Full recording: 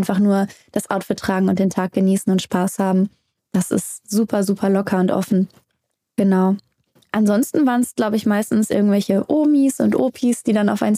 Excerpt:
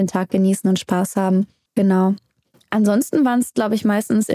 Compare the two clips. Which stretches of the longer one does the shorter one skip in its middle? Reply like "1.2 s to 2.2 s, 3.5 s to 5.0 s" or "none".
3.3 s to 6.1 s